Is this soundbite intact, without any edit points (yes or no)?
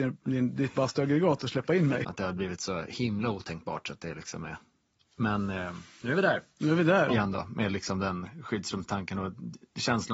no